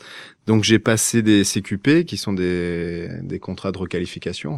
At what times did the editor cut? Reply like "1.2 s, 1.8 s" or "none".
none